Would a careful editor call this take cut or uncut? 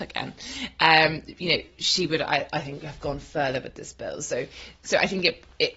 uncut